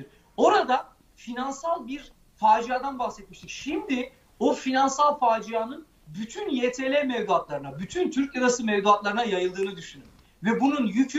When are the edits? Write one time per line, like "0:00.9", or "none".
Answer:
none